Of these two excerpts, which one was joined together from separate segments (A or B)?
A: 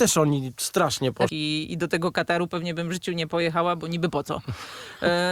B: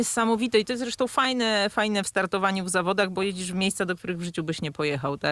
A